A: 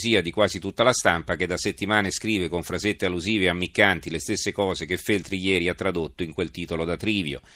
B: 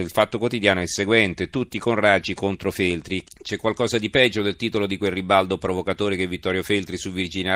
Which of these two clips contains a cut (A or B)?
B